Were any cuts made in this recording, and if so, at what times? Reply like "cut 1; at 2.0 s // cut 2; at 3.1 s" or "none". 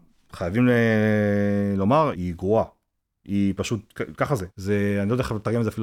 cut 1; at 2.1 s // cut 2; at 4.5 s